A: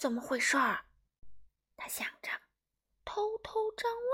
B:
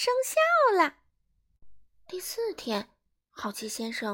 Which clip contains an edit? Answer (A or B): A